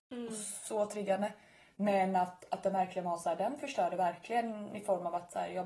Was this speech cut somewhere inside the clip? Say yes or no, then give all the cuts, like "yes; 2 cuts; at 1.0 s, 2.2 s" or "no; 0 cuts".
yes; 1 cut; at 1.7 s